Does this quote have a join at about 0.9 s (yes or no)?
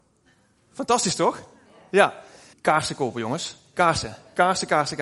no